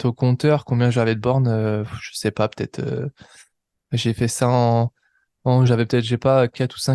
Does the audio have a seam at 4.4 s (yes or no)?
no